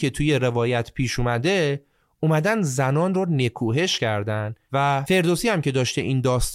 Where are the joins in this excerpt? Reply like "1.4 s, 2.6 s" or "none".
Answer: 4.7 s